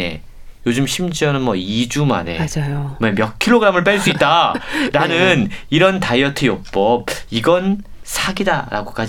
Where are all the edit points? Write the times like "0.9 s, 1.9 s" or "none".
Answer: none